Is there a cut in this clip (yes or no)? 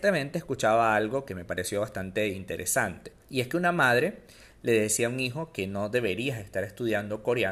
yes